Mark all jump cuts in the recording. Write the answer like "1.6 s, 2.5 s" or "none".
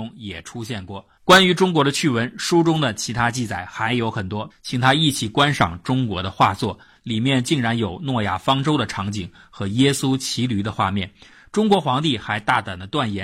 1.2 s, 4.5 s